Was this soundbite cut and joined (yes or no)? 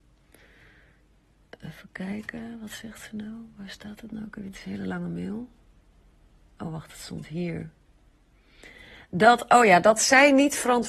no